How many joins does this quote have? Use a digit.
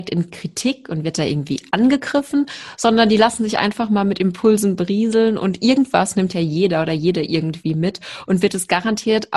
0